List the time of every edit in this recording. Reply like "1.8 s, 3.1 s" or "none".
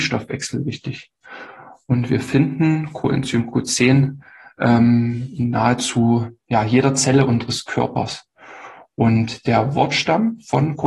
none